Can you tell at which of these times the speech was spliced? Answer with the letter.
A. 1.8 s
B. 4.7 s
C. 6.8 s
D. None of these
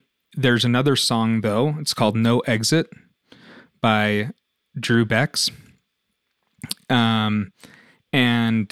D